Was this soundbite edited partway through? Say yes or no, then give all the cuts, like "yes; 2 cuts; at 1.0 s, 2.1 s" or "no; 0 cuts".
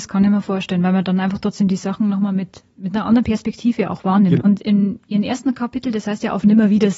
yes; 1 cut; at 4.4 s